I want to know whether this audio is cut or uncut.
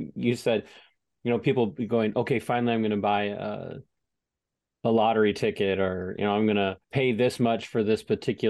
cut